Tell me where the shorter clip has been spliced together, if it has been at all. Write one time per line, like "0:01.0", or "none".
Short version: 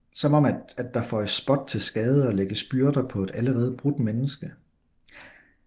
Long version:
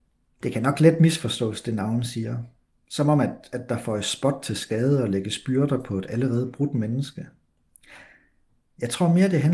none